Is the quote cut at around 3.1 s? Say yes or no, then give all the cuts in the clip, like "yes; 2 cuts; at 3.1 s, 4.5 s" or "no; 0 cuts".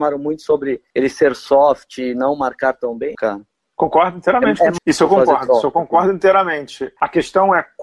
yes; 2 cuts; at 3.1 s, 4.8 s